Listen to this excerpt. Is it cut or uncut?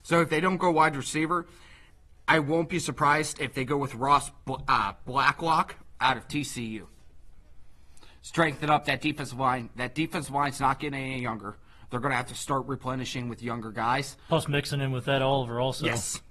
uncut